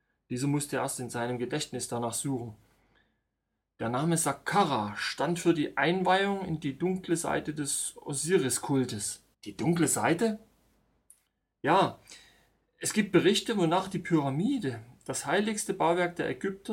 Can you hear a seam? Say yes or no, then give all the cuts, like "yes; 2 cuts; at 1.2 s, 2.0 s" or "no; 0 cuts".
yes; 1 cut; at 9.3 s